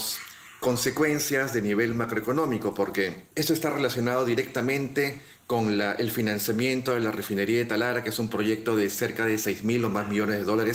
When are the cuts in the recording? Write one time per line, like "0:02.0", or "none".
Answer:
0:03.3